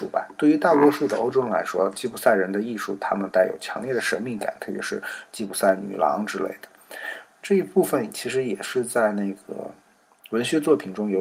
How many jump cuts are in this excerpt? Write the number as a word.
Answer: zero